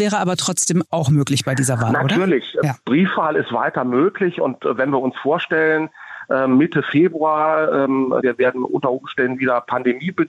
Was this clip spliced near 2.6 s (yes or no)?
no